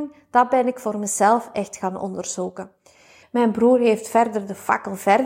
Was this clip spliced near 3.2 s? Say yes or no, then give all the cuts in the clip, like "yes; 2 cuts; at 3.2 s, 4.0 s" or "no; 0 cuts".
yes; 1 cut; at 3.2 s